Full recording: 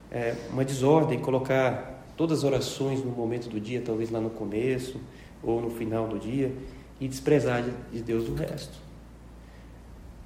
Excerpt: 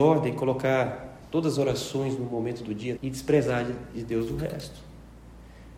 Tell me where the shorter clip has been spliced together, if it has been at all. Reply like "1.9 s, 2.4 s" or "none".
3.0 s

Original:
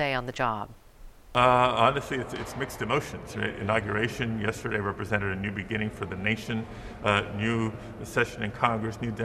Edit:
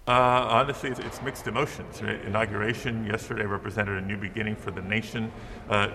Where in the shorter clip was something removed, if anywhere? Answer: 0.9 s

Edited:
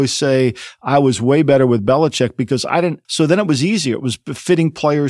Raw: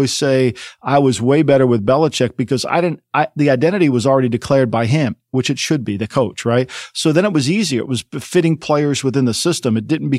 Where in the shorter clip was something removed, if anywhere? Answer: 3.0 s

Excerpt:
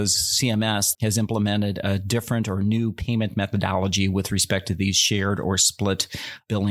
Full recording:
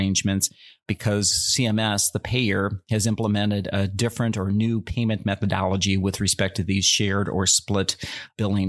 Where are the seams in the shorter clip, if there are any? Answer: 0.9 s

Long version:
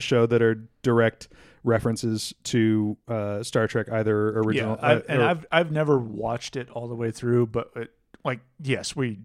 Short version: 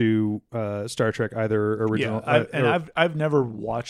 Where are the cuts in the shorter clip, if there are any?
none

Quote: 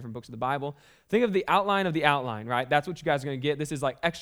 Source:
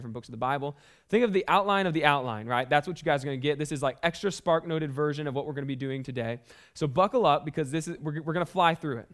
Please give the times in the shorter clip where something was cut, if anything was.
none

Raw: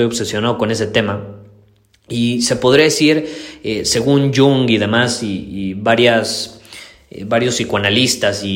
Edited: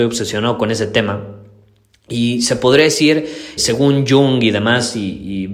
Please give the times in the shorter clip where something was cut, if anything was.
3.6 s

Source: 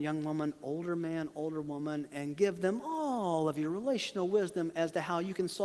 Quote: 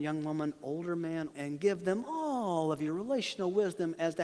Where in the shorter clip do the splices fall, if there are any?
1.3 s

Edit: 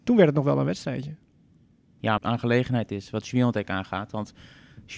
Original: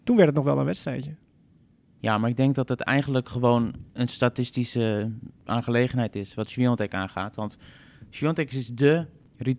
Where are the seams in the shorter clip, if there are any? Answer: 2.2 s

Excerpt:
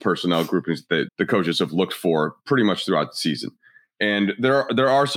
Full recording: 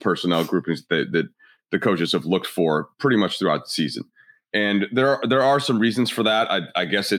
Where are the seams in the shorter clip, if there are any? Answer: 1.1 s

